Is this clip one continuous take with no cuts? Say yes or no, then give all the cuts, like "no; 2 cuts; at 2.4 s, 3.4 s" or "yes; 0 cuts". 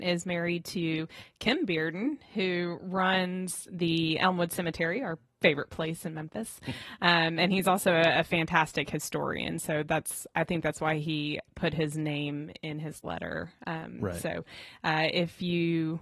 yes; 0 cuts